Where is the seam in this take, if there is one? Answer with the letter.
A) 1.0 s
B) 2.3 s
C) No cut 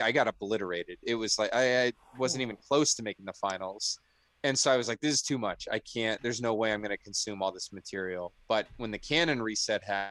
C